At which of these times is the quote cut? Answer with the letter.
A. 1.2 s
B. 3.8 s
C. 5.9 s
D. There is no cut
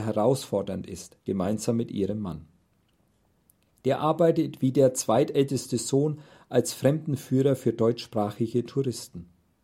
A